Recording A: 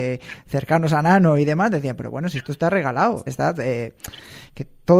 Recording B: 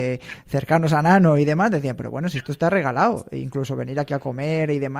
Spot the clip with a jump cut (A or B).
A